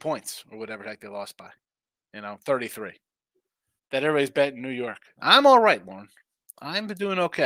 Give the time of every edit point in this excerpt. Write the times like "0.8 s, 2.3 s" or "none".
3.8 s, 5.2 s